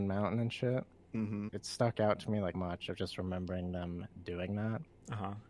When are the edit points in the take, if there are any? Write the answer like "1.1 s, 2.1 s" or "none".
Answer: 1.5 s, 2.5 s